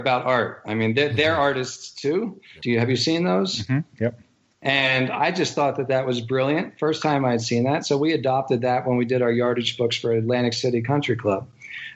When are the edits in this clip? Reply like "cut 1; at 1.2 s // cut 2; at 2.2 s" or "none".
cut 1; at 2.6 s